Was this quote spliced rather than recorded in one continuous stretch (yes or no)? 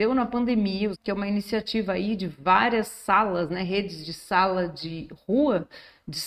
yes